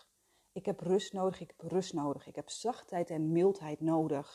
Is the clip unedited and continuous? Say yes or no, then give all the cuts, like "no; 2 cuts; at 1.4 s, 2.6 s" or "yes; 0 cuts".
yes; 0 cuts